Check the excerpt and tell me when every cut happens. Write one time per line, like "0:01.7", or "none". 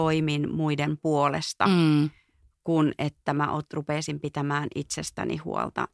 none